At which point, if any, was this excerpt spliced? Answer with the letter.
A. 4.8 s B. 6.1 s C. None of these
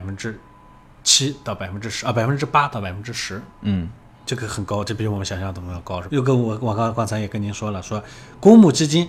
B